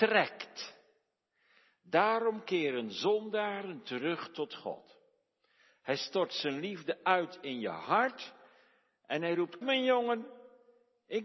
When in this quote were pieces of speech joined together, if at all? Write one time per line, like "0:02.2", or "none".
0:09.6